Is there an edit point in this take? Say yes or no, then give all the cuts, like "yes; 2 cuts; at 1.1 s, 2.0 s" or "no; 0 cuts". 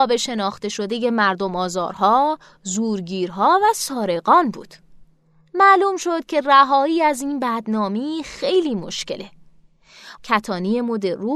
yes; 1 cut; at 10.2 s